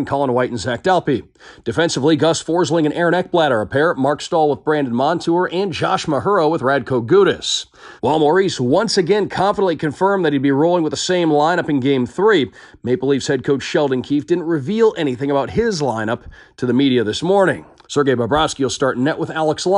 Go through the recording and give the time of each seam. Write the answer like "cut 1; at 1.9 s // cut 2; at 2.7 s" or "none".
cut 1; at 8.0 s // cut 2; at 17.8 s